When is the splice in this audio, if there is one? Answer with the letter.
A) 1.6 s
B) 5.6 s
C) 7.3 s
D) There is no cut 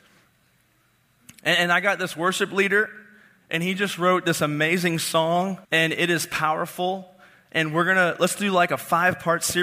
B